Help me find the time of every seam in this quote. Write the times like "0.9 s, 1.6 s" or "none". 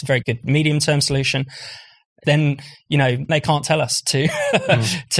2.2 s, 3.3 s